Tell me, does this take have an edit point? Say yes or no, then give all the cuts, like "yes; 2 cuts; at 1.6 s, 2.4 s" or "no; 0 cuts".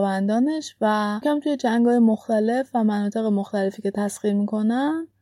yes; 1 cut; at 1.2 s